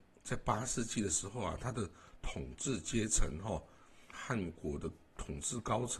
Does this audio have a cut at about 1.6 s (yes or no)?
no